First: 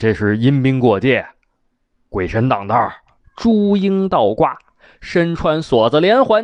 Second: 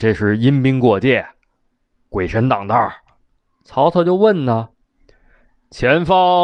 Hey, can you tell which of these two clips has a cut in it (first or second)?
first